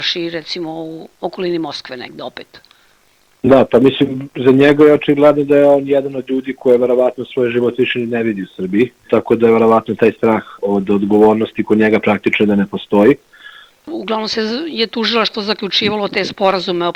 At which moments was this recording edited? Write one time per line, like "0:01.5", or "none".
0:09.1
0:13.8